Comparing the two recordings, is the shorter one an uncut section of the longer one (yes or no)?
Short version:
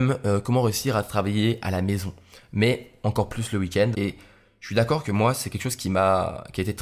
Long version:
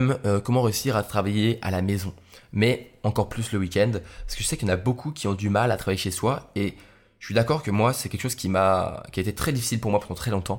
no